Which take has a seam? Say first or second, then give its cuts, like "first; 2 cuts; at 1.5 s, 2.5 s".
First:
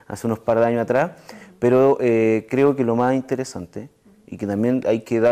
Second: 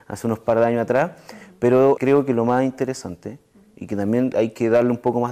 second; 1 cut; at 2.0 s